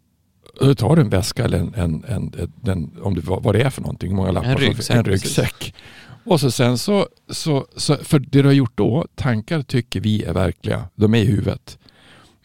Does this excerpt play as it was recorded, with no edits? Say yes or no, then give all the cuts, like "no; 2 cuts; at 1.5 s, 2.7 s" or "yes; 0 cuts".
no; 2 cuts; at 9.1 s, 10.9 s